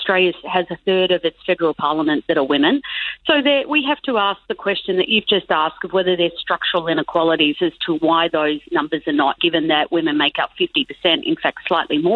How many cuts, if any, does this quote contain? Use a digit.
1